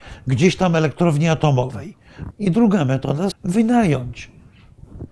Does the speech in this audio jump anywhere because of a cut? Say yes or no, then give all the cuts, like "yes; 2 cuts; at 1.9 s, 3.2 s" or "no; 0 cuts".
yes; 2 cuts; at 2.3 s, 3.3 s